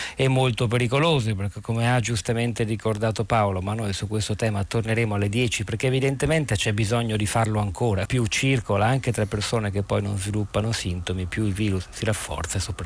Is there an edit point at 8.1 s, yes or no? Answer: yes